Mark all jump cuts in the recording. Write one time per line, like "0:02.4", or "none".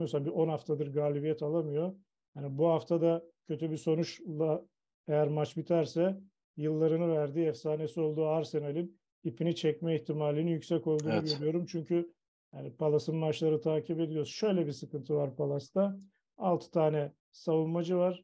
none